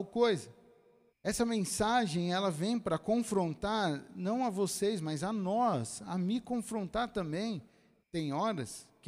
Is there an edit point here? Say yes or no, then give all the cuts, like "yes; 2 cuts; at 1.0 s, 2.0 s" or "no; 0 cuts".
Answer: yes; 2 cuts; at 1.1 s, 8.0 s